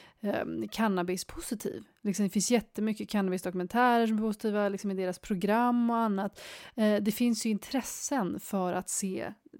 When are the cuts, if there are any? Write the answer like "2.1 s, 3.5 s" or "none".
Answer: none